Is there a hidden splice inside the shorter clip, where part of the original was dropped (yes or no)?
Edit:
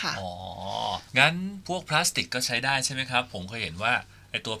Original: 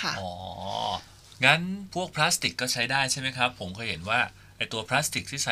yes